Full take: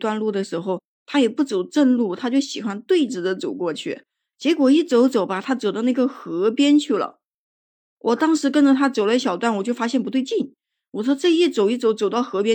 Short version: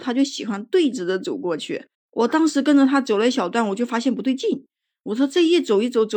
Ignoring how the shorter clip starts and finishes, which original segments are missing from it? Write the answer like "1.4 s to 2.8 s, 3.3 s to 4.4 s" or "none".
4.1 s to 7.8 s

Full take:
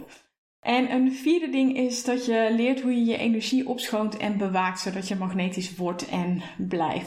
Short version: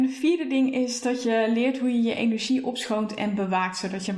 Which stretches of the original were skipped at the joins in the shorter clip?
none

